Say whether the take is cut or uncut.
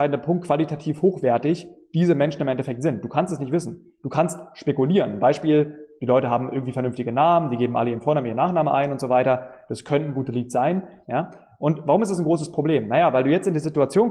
cut